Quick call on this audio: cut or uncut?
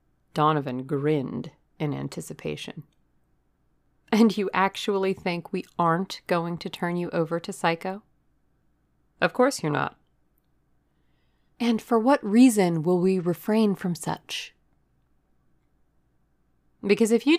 uncut